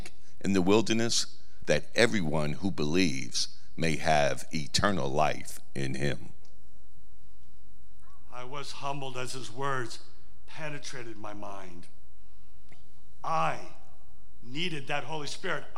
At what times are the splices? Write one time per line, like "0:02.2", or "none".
0:01.6